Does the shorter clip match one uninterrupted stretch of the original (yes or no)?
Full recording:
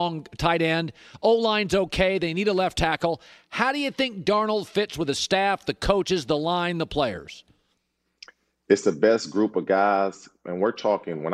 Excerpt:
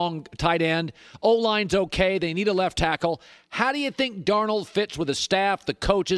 yes